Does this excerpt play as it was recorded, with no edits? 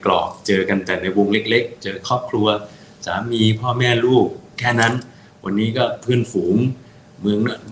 yes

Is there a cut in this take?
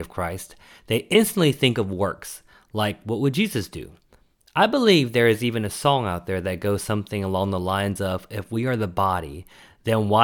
no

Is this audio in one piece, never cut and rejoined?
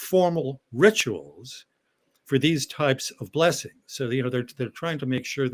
yes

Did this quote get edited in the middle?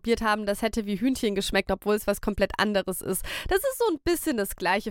no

